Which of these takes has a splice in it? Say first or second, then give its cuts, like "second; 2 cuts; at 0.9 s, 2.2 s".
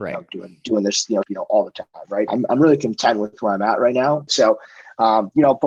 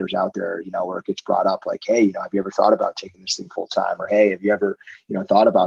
first; 3 cuts; at 1.2 s, 2.3 s, 4.3 s